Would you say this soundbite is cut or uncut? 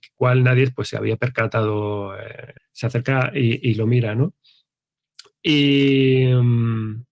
cut